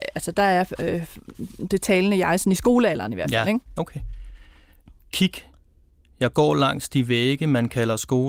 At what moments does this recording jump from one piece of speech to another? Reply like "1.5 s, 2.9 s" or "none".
none